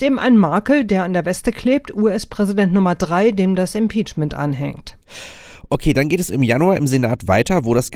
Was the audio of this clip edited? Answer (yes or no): no